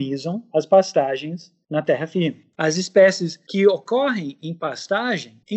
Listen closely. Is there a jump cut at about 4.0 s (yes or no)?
no